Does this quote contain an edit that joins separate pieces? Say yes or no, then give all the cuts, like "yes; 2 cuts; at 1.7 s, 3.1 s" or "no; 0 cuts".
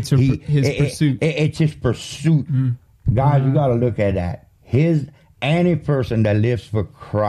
yes; 1 cut; at 2.5 s